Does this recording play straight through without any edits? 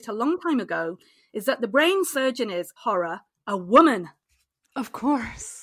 no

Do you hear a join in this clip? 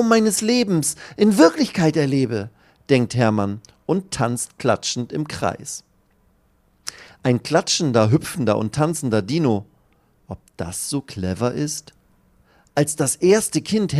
no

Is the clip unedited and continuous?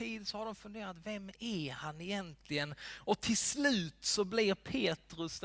yes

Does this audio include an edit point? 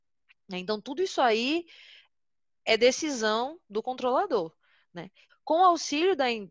yes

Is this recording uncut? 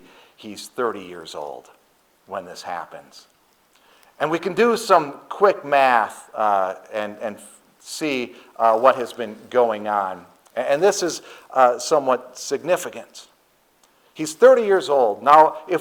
yes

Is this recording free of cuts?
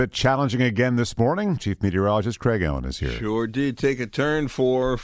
yes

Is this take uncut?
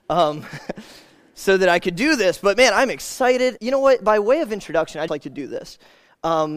no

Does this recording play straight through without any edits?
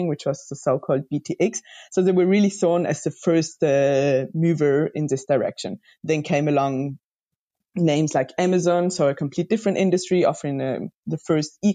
yes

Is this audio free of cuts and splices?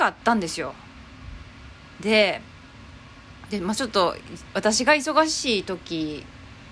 no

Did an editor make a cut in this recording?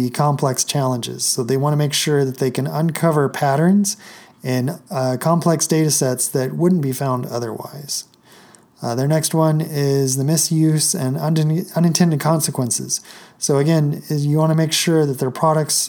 no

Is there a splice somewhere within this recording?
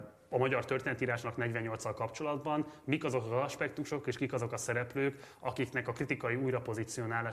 no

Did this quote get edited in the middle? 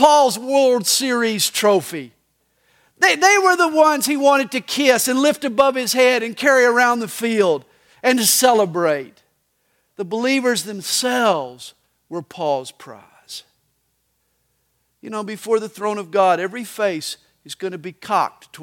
no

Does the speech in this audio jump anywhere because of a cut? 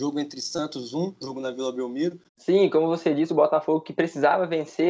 yes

